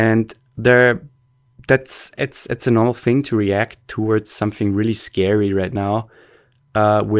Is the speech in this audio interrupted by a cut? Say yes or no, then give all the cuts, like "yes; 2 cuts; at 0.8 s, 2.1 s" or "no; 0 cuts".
no; 0 cuts